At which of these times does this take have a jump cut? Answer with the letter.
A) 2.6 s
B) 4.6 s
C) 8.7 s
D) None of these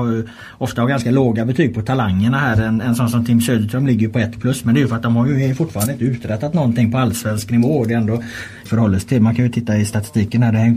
C